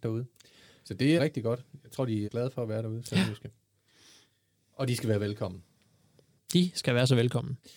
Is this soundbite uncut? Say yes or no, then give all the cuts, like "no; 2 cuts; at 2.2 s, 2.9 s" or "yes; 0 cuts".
no; 2 cuts; at 1.2 s, 2.2 s